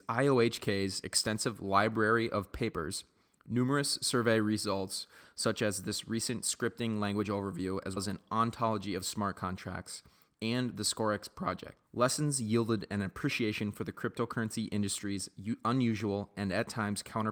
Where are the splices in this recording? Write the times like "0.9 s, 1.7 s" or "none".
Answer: 8.0 s, 11.8 s